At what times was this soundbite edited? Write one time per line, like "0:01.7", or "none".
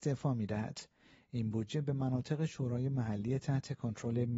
none